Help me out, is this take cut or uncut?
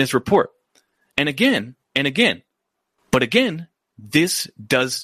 cut